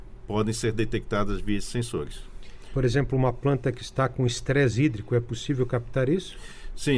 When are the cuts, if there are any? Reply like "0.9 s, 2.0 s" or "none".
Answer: none